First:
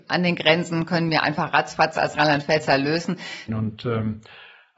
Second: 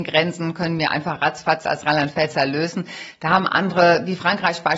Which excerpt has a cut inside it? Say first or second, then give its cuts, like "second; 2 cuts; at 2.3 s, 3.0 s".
first; 1 cut; at 3.5 s